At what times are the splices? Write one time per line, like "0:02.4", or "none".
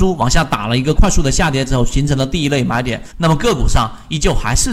0:00.9
0:03.1

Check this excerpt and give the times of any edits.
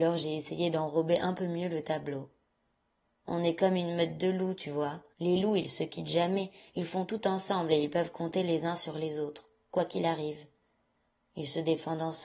0:05.1

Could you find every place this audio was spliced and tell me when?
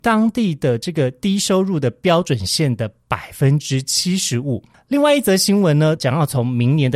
0:04.7
0:06.0

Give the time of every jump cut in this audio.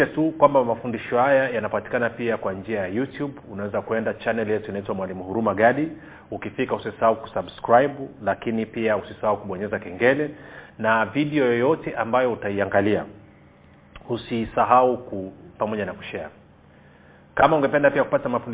0:15.6

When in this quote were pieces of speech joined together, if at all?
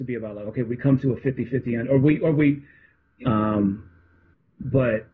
0:03.2

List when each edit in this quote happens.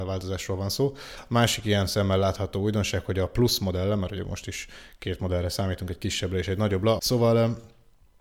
0:07.0

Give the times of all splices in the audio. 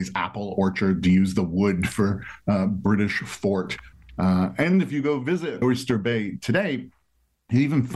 0:05.6

